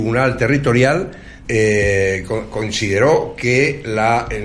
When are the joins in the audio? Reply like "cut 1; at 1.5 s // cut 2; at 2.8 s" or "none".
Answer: cut 1; at 1.4 s